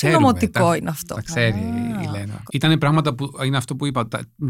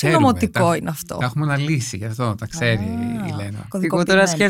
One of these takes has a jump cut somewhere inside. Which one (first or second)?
first